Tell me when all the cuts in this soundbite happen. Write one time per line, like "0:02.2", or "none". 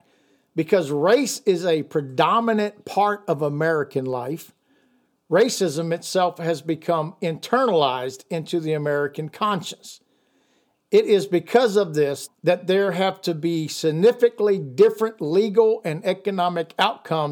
0:12.3